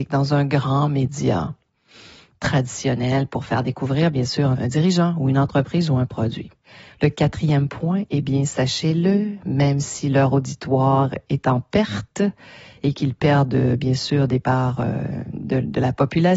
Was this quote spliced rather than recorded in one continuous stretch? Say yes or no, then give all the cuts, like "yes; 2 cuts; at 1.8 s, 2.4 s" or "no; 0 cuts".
no; 0 cuts